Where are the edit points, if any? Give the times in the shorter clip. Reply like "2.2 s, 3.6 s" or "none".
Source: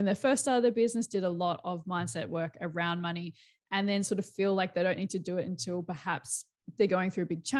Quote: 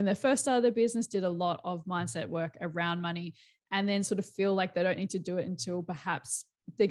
none

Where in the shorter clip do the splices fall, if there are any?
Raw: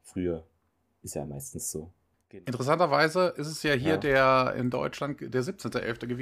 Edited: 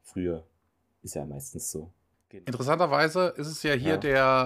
none

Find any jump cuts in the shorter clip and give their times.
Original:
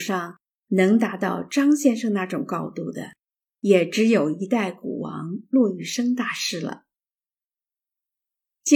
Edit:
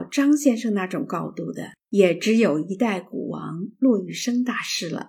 1.8 s

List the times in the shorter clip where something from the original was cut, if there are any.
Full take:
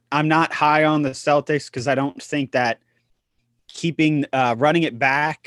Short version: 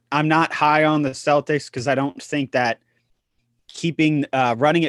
none

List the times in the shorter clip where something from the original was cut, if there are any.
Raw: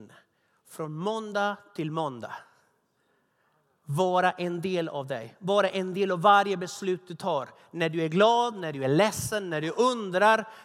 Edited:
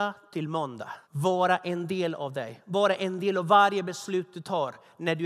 1.0 s

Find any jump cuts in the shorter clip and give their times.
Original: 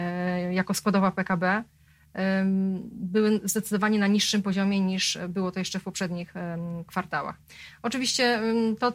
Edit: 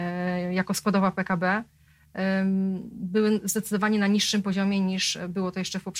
none

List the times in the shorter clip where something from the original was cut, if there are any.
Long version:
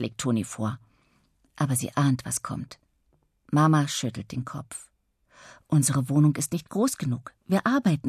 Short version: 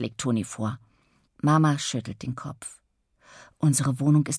1.3 s

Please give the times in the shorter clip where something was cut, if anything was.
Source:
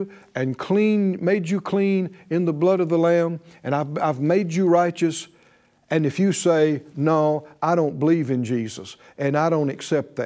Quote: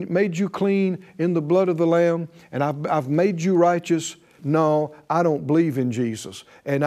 4.4 s

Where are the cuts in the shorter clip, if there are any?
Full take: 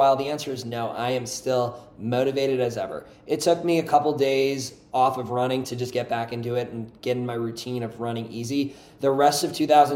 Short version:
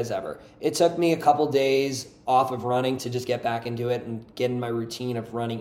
none

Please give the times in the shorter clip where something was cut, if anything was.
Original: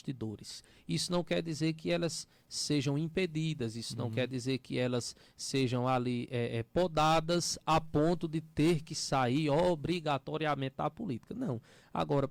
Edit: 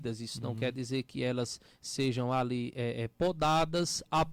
none

